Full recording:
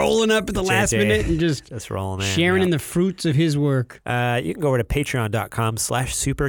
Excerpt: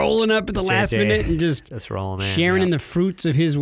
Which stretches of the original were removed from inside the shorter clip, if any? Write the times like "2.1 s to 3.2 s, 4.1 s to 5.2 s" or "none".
none